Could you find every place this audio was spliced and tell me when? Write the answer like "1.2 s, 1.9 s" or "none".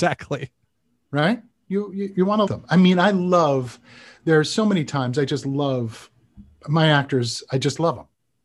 2.5 s